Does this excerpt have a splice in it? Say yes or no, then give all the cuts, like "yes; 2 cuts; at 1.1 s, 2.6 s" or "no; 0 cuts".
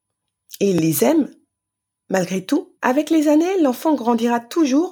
yes; 1 cut; at 2.8 s